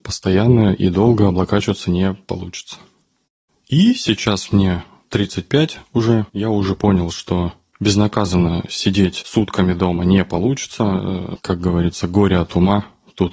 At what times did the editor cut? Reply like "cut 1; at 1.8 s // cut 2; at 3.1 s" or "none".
cut 1; at 6.3 s // cut 2; at 11.4 s